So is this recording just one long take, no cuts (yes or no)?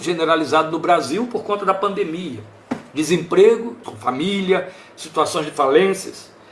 no